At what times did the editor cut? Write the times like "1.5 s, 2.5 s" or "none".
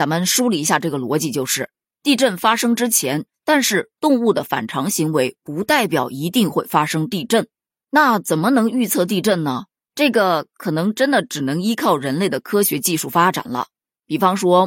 3.3 s